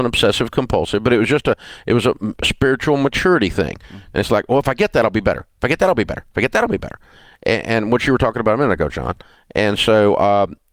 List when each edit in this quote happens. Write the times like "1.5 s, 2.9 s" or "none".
none